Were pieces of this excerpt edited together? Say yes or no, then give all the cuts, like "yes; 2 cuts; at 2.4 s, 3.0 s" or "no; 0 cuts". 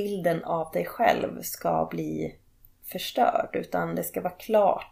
no; 0 cuts